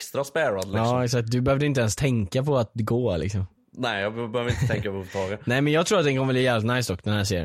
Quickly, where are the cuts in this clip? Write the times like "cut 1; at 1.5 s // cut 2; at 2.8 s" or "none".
none